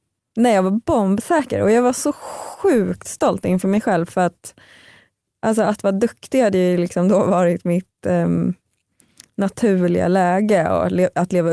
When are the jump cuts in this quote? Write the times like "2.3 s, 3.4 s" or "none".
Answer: none